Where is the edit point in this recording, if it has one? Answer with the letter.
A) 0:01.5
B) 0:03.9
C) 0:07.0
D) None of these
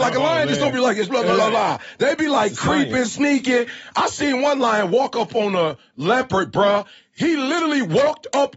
D